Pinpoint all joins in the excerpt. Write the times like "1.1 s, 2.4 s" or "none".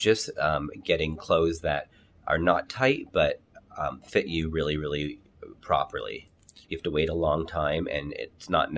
6.6 s